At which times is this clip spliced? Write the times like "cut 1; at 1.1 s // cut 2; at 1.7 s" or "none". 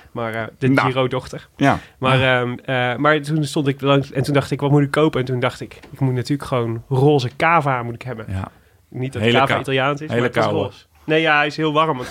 none